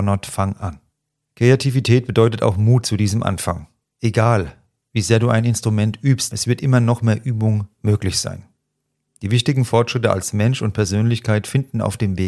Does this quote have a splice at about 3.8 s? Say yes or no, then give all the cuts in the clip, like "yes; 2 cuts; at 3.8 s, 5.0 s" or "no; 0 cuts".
yes; 2 cuts; at 3.8 s, 6.3 s